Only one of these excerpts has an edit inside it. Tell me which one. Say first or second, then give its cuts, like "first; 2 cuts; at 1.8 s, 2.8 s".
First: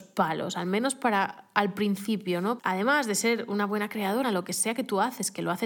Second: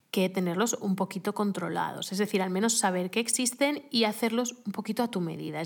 first; 2 cuts; at 2.6 s, 4.2 s